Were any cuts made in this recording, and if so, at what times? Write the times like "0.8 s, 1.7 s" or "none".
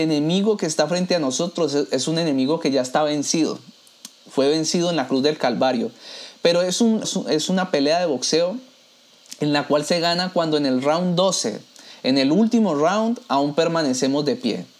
7.0 s